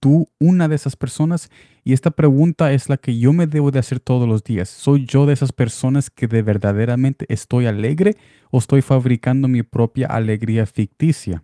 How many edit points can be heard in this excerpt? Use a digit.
0